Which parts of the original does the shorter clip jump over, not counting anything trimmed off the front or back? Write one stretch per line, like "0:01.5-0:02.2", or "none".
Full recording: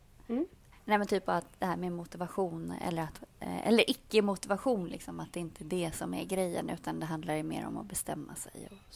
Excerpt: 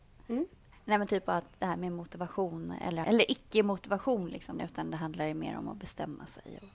0:03.0-0:03.6
0:05.1-0:06.6